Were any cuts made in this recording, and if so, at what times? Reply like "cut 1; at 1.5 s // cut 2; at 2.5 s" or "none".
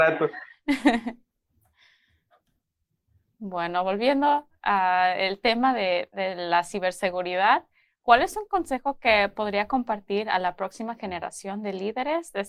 none